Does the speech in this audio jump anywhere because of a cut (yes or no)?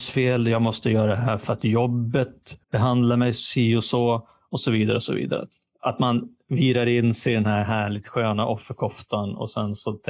yes